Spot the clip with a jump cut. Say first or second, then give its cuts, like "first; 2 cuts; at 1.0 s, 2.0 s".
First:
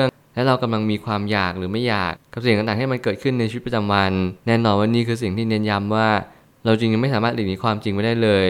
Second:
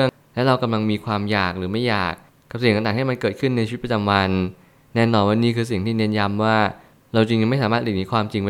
first; 2 cuts; at 2.1 s, 4.4 s